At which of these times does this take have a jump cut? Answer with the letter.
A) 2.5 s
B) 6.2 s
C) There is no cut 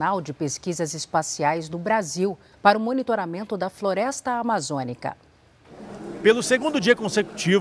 A